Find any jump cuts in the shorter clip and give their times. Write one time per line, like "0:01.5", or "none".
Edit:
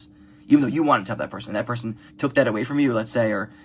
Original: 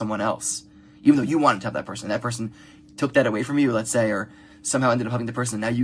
0:02.1

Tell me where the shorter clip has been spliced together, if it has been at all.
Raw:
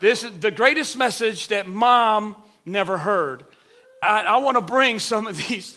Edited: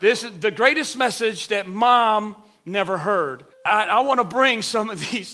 0:03.5

